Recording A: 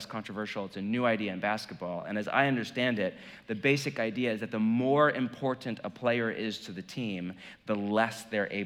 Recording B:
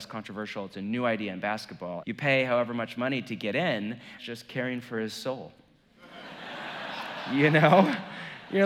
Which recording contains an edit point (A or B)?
B